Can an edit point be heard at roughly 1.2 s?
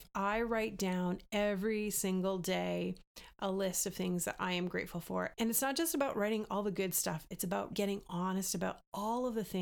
no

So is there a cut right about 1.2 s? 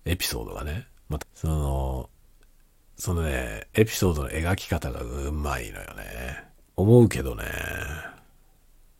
yes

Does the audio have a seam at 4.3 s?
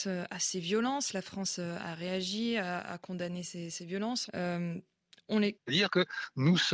yes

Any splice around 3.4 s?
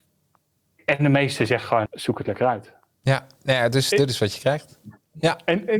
no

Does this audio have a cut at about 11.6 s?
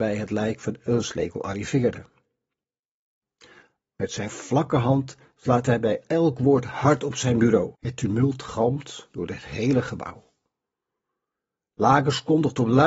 no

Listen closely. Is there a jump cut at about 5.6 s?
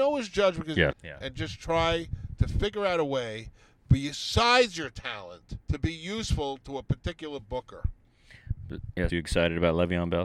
yes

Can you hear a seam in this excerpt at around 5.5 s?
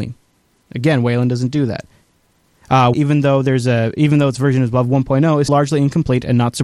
yes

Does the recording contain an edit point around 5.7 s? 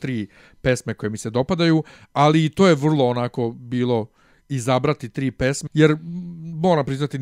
yes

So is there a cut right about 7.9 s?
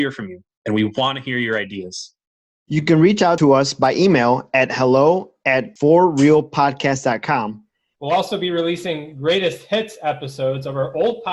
yes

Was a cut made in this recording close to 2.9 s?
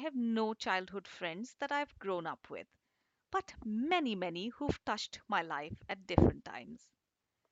no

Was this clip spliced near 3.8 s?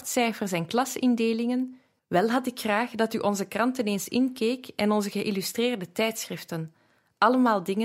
no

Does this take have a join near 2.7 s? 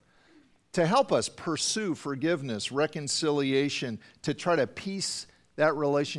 no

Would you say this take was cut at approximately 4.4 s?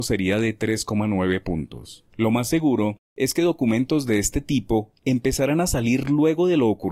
no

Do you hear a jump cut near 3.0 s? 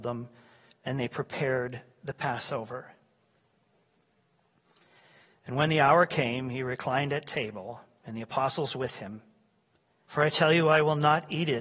no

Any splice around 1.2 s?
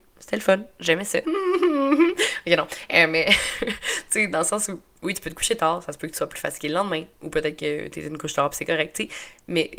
yes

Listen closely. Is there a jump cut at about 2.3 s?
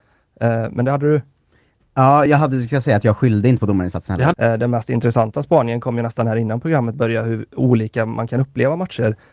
yes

